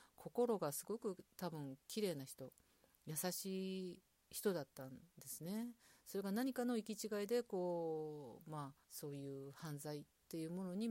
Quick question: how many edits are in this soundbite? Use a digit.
1